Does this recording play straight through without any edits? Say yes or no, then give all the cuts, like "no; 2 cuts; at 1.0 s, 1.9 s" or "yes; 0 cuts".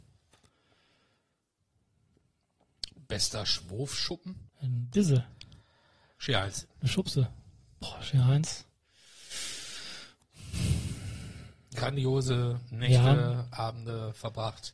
no; 1 cut; at 4.5 s